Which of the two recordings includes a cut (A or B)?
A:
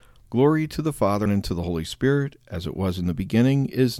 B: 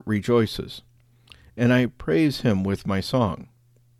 A